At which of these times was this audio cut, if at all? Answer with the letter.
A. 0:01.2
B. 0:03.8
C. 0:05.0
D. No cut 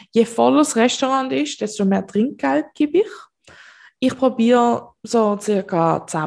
C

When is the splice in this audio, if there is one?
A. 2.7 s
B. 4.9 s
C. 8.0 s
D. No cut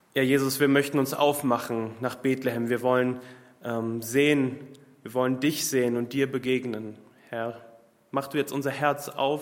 D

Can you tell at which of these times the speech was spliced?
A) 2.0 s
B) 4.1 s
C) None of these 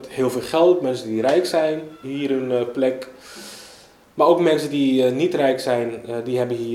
A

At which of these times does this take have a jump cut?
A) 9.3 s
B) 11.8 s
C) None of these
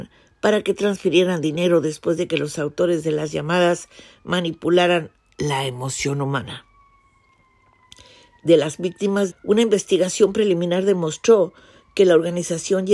A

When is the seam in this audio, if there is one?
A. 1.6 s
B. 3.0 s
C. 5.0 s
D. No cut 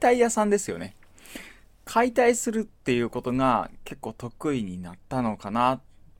C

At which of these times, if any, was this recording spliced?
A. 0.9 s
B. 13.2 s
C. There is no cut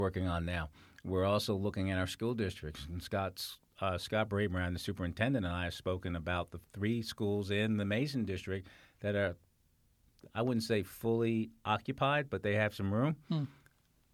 C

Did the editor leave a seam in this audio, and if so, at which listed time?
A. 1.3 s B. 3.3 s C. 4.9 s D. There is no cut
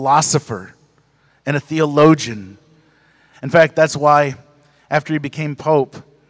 B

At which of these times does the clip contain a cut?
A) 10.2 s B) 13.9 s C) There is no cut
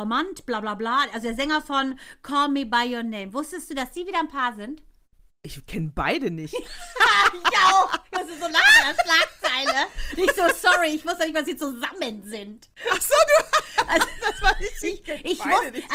C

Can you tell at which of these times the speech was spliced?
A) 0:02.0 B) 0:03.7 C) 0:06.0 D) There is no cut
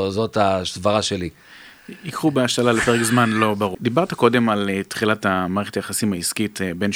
B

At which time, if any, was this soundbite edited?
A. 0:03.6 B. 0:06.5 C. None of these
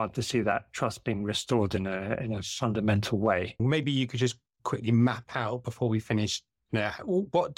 A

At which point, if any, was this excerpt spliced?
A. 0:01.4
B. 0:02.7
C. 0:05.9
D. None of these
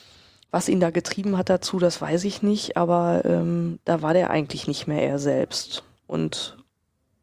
D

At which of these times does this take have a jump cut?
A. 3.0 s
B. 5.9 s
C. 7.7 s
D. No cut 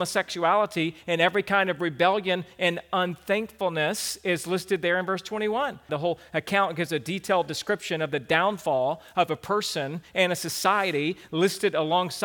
B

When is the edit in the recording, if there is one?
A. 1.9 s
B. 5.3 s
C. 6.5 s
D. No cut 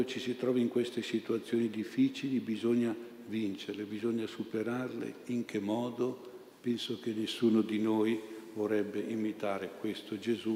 C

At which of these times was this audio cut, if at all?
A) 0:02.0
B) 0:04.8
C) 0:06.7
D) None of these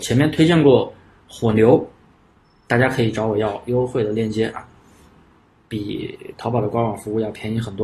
D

